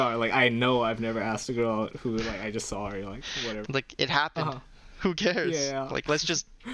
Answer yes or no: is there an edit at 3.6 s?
yes